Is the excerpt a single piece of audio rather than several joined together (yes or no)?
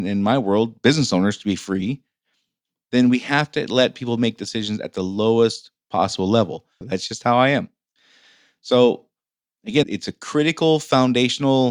no